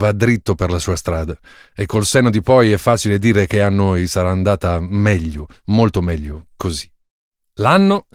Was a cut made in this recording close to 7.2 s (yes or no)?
no